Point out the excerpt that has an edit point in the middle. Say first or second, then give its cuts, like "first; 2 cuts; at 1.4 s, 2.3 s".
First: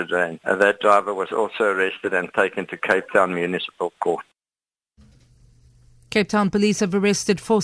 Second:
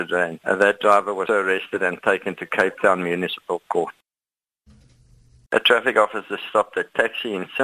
second; 2 cuts; at 1.3 s, 5.5 s